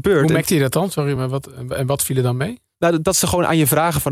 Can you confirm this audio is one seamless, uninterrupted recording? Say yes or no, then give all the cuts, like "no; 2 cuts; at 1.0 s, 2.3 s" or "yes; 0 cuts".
yes; 0 cuts